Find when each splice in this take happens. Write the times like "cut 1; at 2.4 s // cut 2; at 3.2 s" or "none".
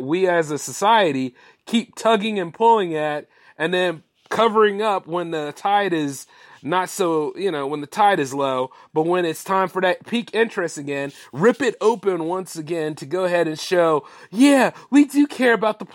none